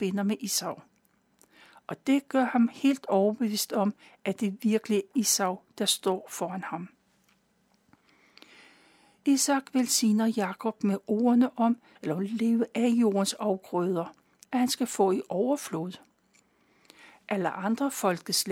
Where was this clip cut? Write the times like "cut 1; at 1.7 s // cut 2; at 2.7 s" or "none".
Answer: cut 1; at 5.1 s // cut 2; at 12.0 s // cut 3; at 14.4 s